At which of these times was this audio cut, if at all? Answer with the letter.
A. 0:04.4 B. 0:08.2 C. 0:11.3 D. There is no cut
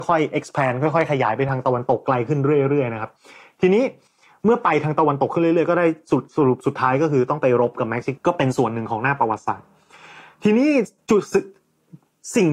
B